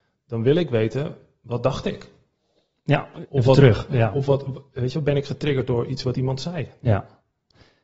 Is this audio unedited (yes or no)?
yes